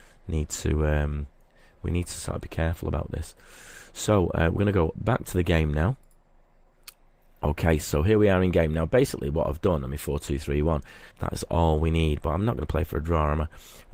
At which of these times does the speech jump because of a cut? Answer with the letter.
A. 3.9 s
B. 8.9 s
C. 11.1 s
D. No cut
C